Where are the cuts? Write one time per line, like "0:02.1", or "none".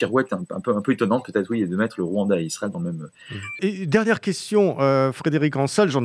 0:03.6